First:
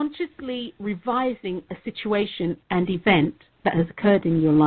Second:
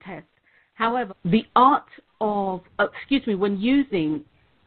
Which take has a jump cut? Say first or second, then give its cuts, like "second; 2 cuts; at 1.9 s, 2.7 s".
second; 1 cut; at 1.1 s